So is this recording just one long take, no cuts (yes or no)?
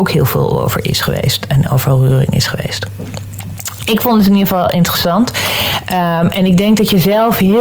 yes